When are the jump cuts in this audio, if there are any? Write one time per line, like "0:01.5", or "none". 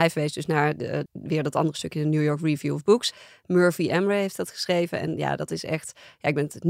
0:01.1